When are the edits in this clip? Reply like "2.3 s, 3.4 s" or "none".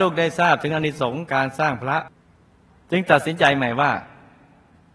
none

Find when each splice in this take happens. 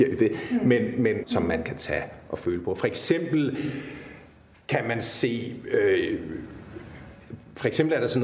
1.2 s

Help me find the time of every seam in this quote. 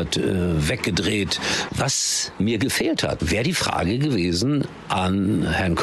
1.7 s, 3.2 s

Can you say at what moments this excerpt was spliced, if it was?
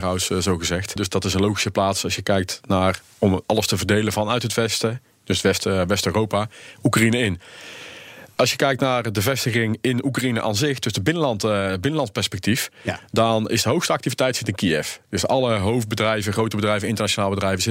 1.0 s

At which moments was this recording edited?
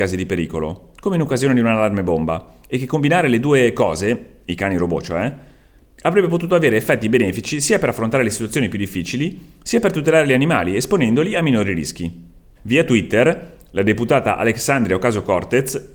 12.6 s

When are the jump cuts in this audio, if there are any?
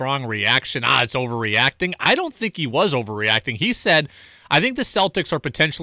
none

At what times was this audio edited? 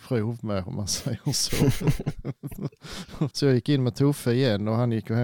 3.3 s

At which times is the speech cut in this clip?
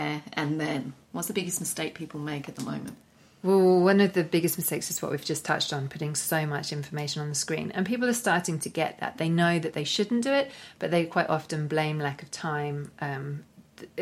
none

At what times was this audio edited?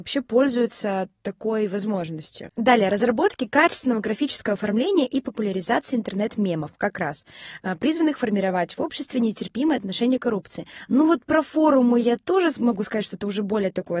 10.9 s

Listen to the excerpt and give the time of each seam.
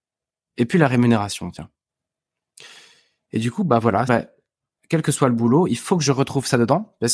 4.1 s

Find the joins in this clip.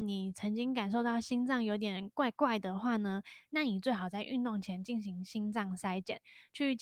none

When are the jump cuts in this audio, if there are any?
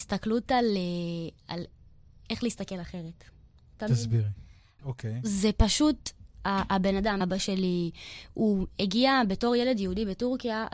4.8 s, 7.2 s

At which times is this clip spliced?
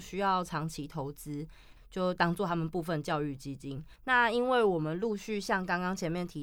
1.8 s, 3.9 s

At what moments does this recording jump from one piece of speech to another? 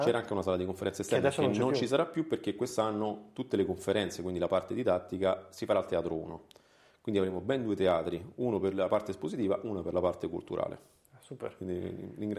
none

